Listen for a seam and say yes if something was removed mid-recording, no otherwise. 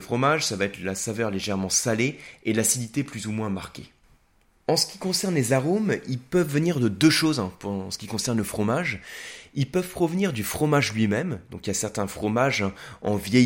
no